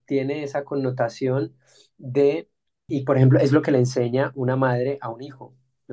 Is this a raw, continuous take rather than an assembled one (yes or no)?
no